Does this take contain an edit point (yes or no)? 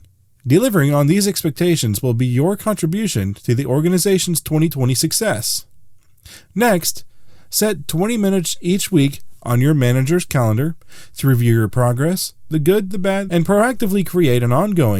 yes